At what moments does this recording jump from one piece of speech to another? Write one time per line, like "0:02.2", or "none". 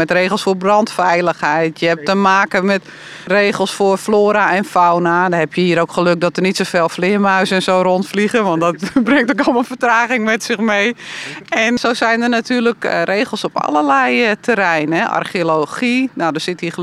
0:03.3
0:11.8